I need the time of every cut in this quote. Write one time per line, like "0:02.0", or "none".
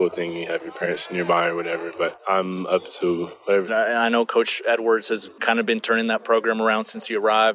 0:03.7